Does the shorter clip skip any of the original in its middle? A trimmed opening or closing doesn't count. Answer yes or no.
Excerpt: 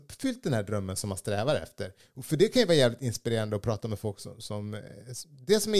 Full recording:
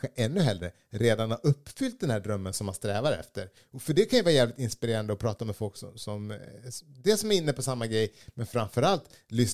no